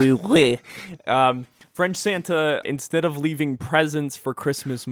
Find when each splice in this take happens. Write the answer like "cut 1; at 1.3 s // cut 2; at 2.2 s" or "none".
cut 1; at 2.6 s